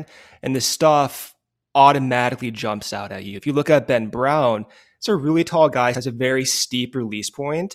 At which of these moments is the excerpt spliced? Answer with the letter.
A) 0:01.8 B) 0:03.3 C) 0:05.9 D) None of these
C